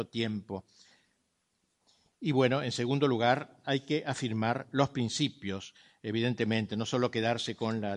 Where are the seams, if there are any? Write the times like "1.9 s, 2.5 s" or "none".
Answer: none